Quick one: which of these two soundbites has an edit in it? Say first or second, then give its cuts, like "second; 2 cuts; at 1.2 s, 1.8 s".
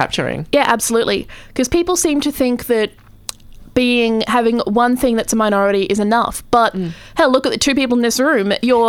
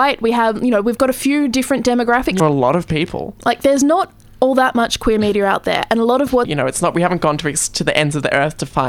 second; 2 cuts; at 2.4 s, 6.4 s